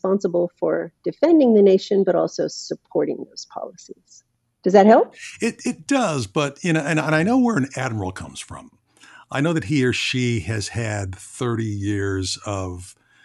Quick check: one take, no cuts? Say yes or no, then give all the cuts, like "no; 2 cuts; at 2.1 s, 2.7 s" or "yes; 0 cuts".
yes; 0 cuts